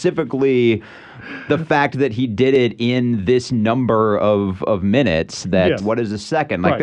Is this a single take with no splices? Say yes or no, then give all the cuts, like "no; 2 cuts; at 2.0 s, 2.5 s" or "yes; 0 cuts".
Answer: no; 1 cut; at 5.8 s